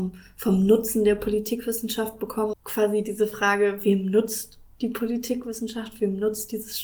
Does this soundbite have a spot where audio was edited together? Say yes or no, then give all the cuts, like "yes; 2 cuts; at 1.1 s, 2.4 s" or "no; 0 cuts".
yes; 1 cut; at 2.5 s